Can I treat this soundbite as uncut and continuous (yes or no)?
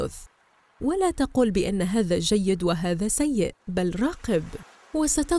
no